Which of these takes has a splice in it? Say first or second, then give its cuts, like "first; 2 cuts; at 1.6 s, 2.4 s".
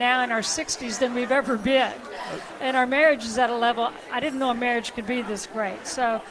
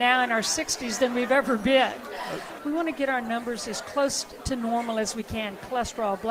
second; 1 cut; at 2.6 s